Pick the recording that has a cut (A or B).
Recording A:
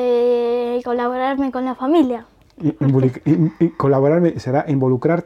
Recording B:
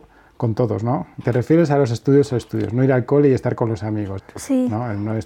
B